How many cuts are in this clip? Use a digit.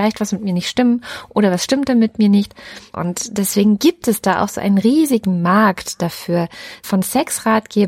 1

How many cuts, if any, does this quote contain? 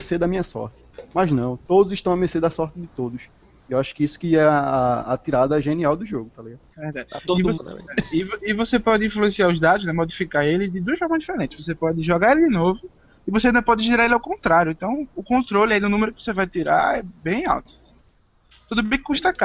1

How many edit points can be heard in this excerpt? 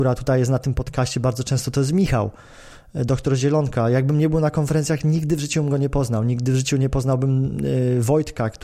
0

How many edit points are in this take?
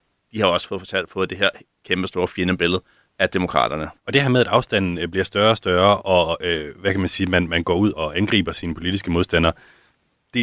2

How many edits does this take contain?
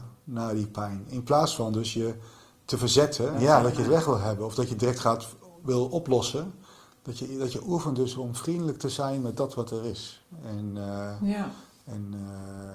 1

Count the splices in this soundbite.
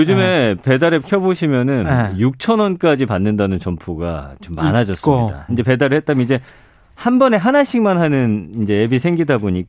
1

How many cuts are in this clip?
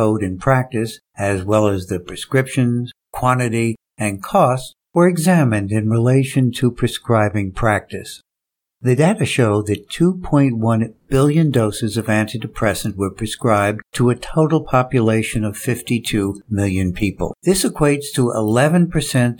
1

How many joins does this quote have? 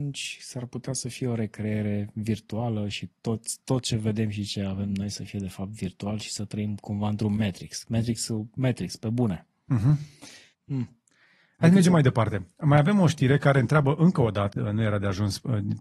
2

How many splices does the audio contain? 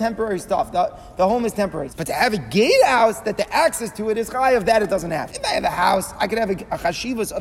2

